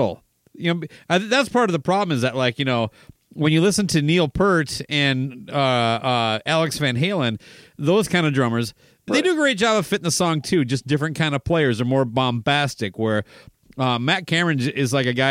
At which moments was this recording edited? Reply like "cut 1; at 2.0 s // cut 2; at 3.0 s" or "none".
cut 1; at 9.1 s